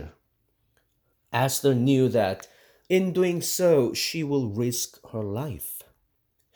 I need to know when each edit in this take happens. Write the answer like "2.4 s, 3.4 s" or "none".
1.1 s